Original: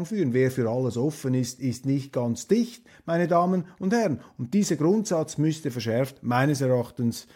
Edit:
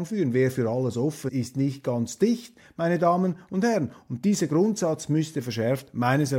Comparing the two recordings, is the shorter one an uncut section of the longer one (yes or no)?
no